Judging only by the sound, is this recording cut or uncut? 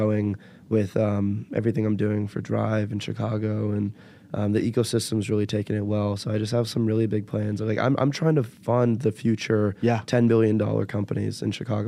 uncut